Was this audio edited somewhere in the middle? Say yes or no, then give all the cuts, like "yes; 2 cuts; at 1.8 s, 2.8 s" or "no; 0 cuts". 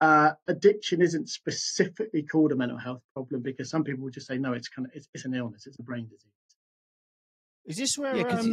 no; 0 cuts